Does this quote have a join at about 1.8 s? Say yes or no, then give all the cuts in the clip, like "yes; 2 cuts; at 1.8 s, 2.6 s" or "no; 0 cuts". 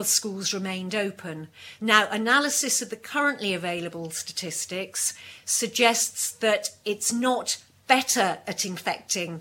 yes; 1 cut; at 1.8 s